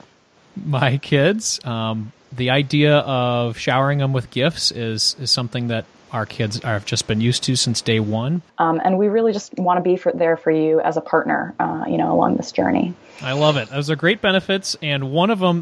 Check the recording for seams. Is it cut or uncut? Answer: cut